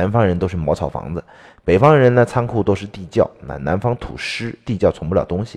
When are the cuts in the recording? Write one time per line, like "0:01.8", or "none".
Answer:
none